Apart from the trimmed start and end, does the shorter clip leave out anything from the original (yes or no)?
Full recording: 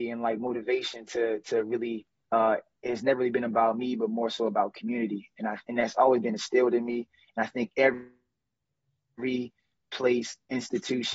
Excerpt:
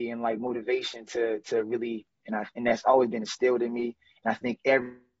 yes